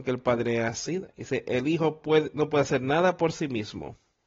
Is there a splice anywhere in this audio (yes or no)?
yes